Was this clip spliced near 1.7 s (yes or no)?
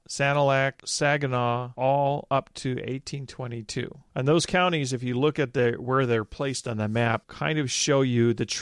yes